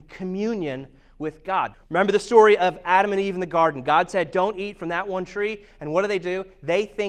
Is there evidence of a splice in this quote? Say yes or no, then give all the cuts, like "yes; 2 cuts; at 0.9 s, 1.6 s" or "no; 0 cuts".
yes; 1 cut; at 1.7 s